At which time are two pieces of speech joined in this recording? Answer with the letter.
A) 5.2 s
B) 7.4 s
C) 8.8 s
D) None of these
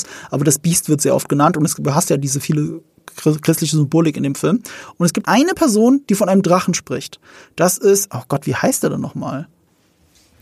A